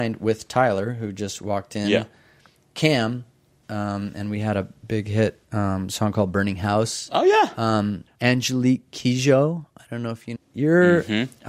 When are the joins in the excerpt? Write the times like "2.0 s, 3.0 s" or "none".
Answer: 3.6 s, 10.4 s